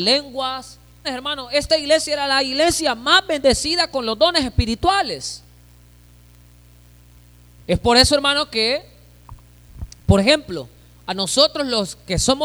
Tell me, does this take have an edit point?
yes; 2 cuts; at 1.0 s, 7.6 s

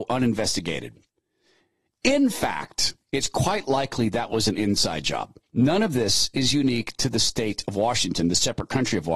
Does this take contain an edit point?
yes; 1 cut; at 5.4 s

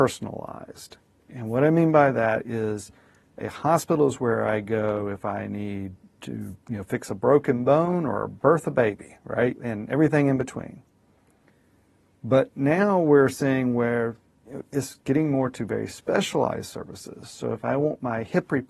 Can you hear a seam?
no; 0 cuts

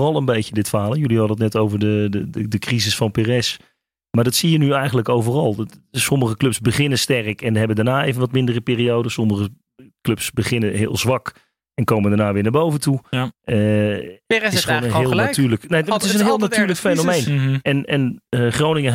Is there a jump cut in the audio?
no; 0 cuts

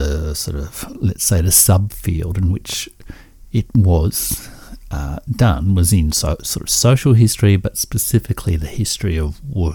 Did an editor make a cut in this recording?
no; 0 cuts

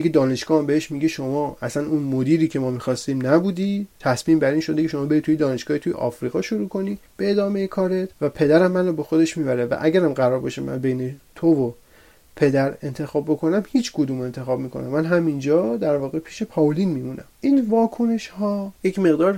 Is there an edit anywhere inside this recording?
yes; 2 cuts; at 7.1 s, 8.1 s

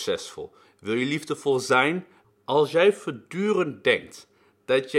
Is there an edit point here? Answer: yes; 1 cut; at 2.2 s

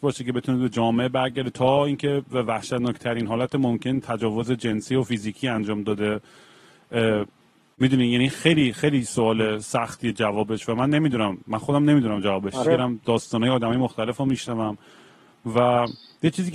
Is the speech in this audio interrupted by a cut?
yes; 1 cut; at 12.6 s

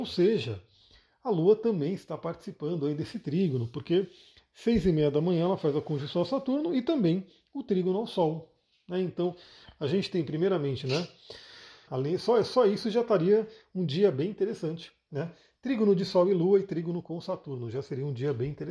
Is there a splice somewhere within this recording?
yes; 1 cut; at 11.9 s

